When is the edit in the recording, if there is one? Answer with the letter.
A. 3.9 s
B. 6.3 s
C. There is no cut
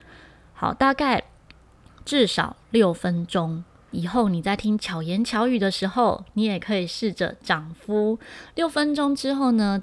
A